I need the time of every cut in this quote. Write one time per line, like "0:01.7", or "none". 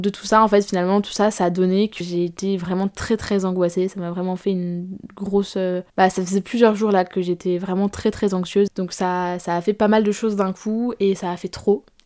0:02.0
0:05.9
0:08.7